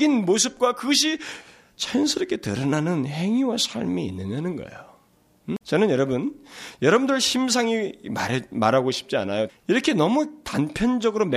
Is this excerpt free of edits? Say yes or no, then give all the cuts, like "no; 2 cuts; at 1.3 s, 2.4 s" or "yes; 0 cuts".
no; 2 cuts; at 5.6 s, 9.5 s